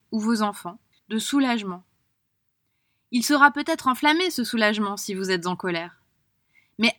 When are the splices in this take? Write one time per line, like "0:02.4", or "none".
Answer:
0:01.0